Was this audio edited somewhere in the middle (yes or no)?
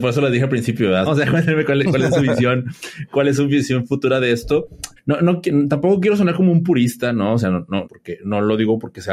yes